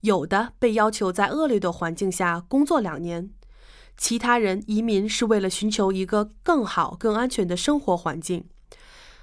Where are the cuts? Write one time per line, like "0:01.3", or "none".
none